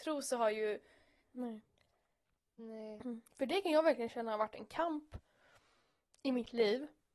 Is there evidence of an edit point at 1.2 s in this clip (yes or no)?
yes